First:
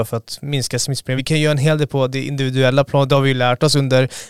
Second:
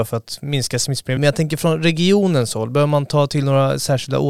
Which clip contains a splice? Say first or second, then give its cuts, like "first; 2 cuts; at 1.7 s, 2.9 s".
second; 1 cut; at 1.2 s